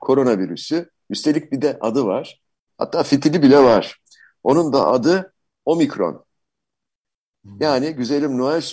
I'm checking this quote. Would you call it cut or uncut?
cut